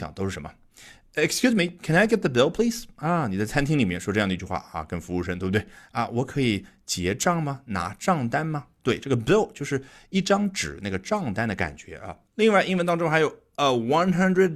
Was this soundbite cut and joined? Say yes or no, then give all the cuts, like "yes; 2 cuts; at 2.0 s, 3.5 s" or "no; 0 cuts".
yes; 1 cut; at 12.2 s